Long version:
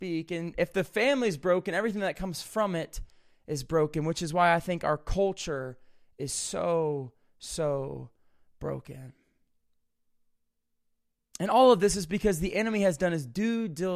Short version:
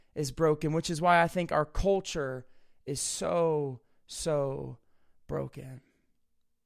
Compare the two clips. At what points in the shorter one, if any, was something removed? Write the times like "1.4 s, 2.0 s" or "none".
none